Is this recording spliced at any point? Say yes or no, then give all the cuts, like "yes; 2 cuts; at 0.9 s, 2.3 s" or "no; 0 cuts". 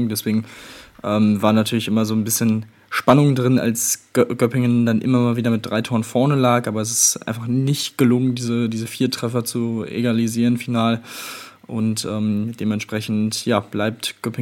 no; 0 cuts